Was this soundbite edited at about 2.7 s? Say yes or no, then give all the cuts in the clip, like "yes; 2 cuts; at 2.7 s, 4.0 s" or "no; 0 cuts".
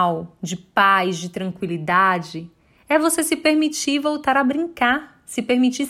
no; 0 cuts